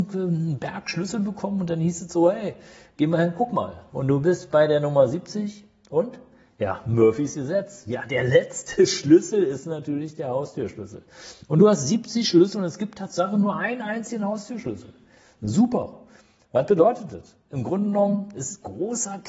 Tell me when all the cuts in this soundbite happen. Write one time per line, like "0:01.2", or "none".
0:03.9